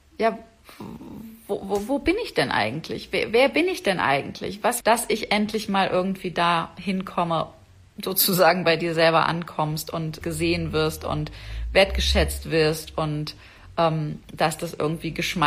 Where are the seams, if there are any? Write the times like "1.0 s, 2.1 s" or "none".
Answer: 4.8 s, 10.2 s